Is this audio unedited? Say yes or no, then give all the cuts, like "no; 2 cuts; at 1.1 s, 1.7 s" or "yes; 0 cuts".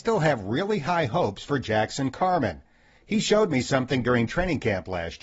yes; 0 cuts